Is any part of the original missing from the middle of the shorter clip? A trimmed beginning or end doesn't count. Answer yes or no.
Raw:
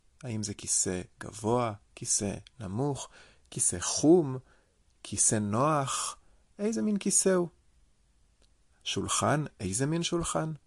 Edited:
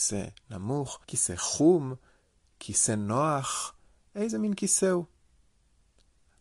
yes